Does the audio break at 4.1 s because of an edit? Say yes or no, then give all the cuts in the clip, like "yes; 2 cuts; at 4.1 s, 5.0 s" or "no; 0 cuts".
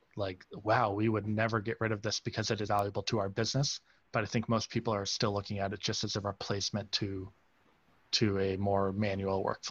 no; 1 cut; at 2.7 s